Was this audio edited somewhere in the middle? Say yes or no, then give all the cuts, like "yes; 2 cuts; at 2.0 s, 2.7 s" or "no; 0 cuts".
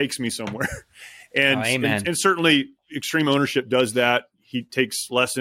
no; 0 cuts